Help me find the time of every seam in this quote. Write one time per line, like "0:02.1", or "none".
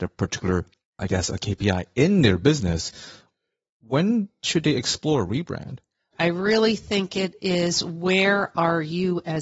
0:01.0
0:06.1